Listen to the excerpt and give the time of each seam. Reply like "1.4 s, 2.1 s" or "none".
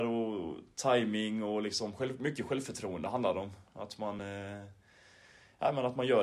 none